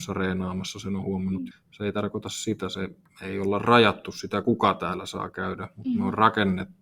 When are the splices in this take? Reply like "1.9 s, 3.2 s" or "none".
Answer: 1.5 s